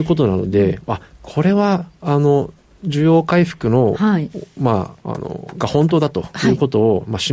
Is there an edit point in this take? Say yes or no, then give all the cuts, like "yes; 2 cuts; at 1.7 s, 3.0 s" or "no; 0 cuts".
yes; 1 cut; at 5.0 s